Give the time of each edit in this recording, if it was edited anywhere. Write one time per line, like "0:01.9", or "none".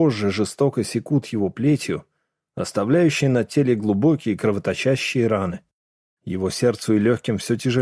0:06.2